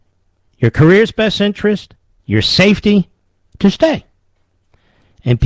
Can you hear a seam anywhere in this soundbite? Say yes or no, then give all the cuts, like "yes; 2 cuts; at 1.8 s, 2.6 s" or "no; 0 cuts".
yes; 1 cut; at 2.2 s